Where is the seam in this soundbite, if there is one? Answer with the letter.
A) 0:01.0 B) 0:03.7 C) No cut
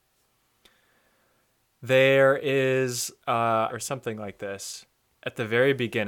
B